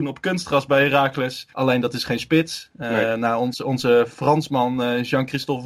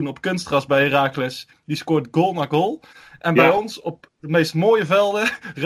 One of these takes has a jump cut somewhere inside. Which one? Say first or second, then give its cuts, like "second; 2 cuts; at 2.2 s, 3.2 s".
first; 1 cut; at 1.5 s